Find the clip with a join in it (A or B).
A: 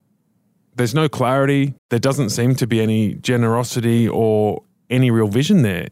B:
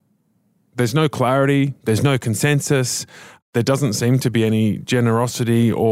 A